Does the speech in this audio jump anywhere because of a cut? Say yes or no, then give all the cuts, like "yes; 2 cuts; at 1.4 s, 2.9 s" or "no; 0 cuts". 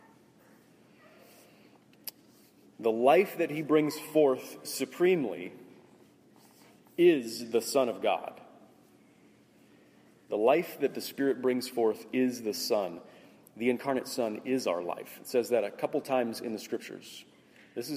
no; 0 cuts